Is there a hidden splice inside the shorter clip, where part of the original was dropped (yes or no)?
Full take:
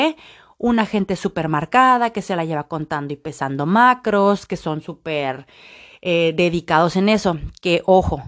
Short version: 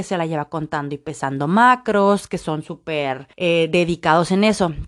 yes